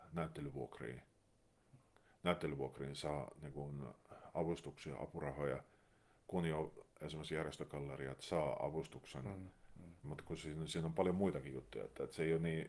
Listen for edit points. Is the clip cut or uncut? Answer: cut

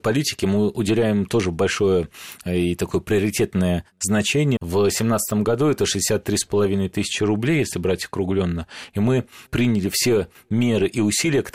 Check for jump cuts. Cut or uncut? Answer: cut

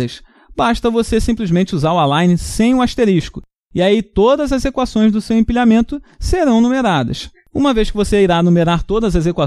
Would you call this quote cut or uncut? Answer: uncut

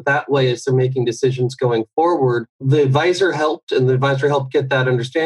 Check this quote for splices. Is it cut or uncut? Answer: cut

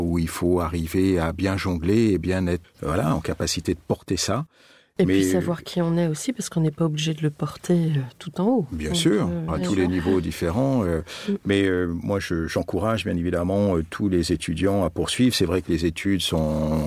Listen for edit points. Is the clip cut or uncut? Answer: cut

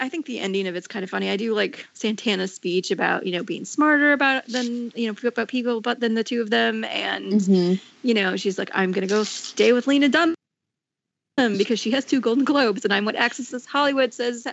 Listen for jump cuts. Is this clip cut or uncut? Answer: uncut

